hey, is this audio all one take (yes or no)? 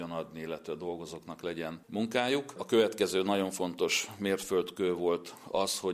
yes